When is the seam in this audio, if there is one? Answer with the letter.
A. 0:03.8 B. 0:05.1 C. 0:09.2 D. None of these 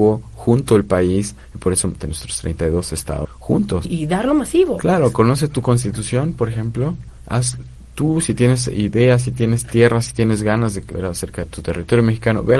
A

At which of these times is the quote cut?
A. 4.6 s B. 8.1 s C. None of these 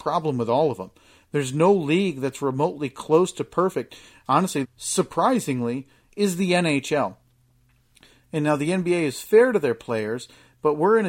A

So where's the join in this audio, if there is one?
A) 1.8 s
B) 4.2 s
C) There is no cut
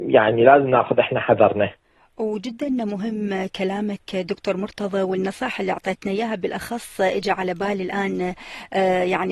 C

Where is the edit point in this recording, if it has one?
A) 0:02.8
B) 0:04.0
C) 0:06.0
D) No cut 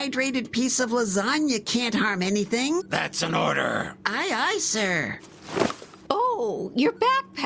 A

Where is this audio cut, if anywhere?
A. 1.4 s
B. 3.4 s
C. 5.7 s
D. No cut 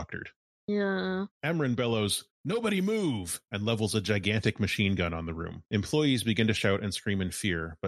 D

